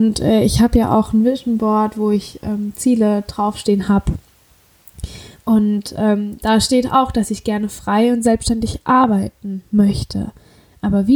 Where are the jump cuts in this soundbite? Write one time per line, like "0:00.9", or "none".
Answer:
none